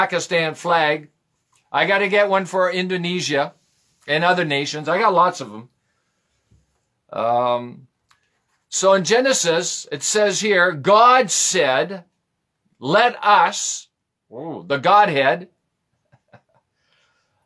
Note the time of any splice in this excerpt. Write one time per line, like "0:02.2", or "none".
none